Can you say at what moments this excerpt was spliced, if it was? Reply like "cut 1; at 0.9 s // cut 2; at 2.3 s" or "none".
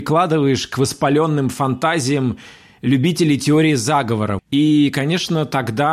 cut 1; at 4.4 s